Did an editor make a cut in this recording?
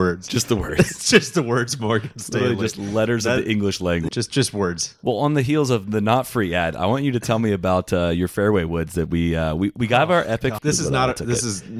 yes; 2 cuts; at 4.1 s, 10.6 s

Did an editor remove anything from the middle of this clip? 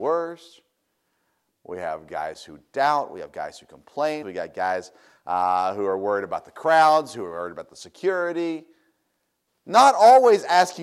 yes; 2 cuts; at 4.2 s, 9.5 s

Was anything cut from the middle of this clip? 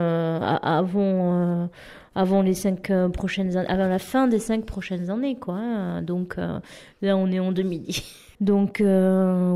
yes; 1 cut; at 8.4 s

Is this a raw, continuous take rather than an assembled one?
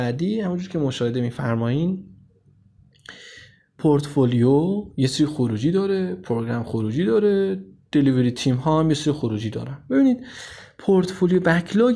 yes; 0 cuts

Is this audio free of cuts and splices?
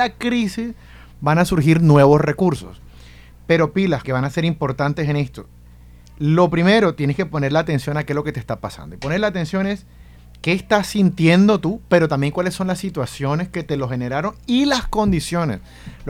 no; 1 cut; at 4.0 s

